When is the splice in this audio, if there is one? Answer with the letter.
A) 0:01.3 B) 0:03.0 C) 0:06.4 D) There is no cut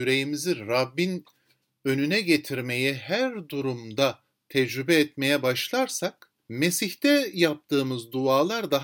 C